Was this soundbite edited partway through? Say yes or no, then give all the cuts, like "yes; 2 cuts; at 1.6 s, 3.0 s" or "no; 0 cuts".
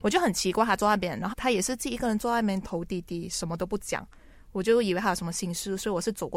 yes; 1 cut; at 1.3 s